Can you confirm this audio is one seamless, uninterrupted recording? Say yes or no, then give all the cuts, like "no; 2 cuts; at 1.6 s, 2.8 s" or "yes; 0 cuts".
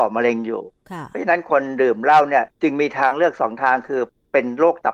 no; 1 cut; at 2.5 s